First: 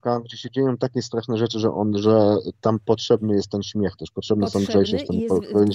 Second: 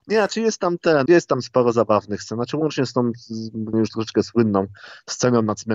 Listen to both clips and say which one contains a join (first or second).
second